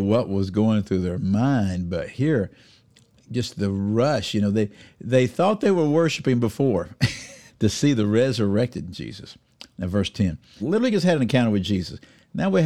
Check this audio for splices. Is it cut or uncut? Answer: cut